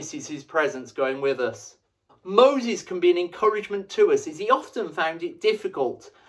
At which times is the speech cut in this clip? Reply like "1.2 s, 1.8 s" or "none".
2.1 s